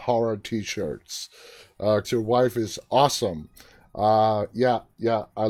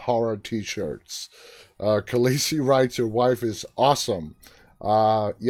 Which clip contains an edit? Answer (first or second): first